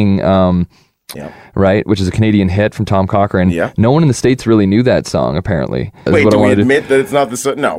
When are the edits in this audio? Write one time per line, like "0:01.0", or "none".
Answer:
0:01.1
0:06.1